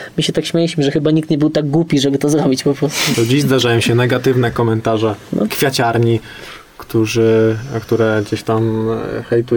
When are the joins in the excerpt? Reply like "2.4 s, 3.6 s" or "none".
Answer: 3.1 s, 5.5 s